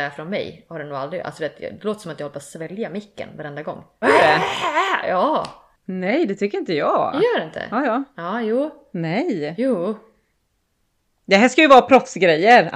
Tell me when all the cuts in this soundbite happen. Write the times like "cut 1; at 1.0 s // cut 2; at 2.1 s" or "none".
cut 1; at 4.0 s